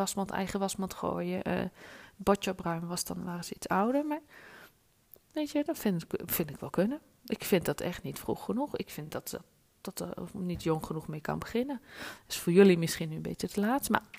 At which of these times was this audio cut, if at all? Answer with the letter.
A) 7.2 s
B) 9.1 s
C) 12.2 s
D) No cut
D